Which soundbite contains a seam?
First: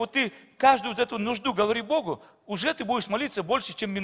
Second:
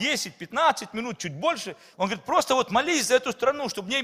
second; 1 cut; at 1.9 s

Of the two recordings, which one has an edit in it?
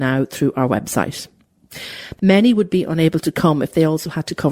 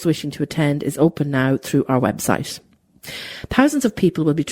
first; 1 cut; at 2.2 s

